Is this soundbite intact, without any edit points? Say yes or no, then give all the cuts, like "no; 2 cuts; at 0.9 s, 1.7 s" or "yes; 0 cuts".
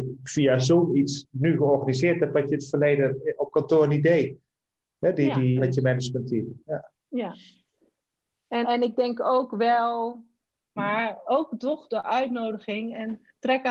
no; 3 cuts; at 5.6 s, 8.6 s, 10.8 s